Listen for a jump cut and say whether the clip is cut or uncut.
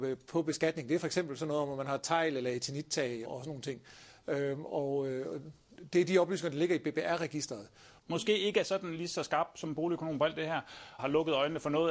cut